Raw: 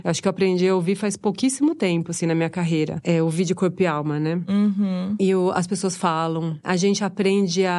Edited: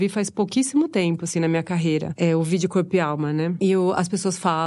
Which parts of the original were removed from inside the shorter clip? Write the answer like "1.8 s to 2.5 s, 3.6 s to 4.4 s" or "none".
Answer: 4.5 s to 5.2 s